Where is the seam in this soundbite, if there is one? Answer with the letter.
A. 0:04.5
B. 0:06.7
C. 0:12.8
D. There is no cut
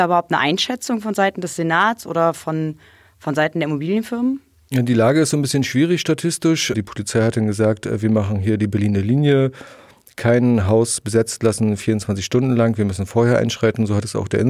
B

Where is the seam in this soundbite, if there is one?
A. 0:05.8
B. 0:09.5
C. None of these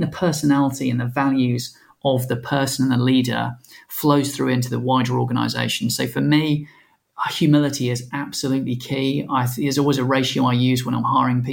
C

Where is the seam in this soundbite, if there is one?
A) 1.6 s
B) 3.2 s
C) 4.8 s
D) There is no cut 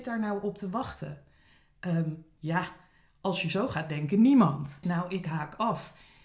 C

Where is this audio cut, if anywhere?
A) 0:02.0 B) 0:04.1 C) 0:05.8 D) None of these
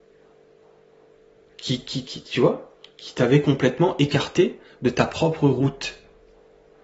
A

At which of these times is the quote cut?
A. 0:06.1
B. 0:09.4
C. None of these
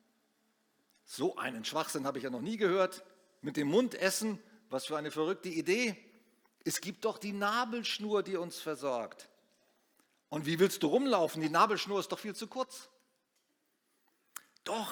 C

